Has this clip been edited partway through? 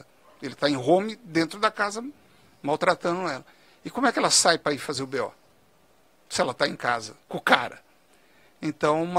no; 0 cuts

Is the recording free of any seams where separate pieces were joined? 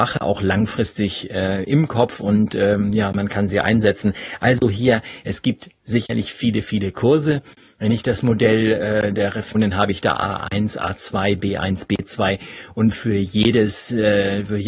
no; 1 cut; at 9.5 s

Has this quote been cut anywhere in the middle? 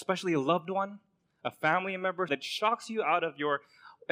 yes; 1 cut; at 2.3 s

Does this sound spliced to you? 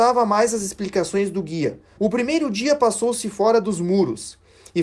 yes; 1 cut; at 2.0 s

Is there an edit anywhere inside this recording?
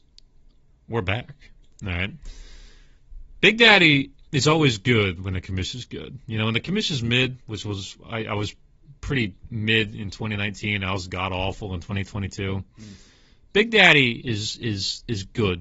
yes; 1 cut; at 4.3 s

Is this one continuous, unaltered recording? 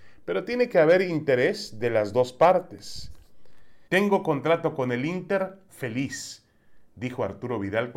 no; 2 cuts; at 3.9 s, 5.7 s

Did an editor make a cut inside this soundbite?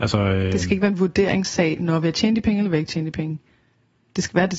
no; 0 cuts

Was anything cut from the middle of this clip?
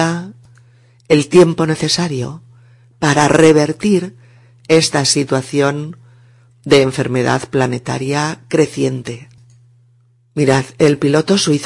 no; 0 cuts

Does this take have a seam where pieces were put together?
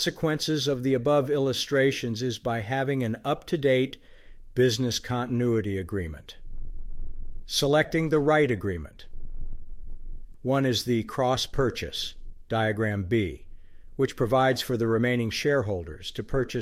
yes; 1 cut; at 10.3 s

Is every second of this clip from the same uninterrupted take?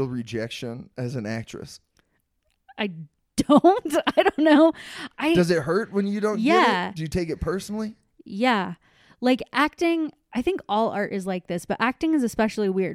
yes; 0 cuts

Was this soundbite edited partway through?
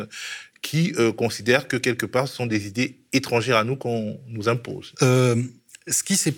yes; 1 cut; at 4.9 s

